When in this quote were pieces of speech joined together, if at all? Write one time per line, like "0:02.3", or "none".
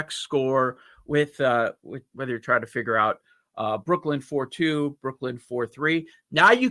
0:02.1